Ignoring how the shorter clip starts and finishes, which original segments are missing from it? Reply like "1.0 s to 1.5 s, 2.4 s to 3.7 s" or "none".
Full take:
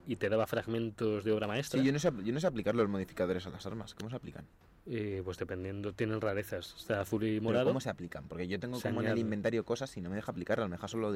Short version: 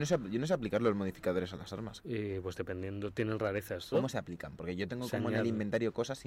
3.9 s to 4.8 s, 6.7 s to 7.6 s